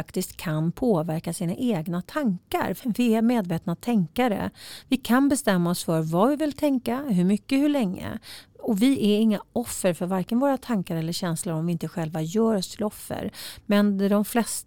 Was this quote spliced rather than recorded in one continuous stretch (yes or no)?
yes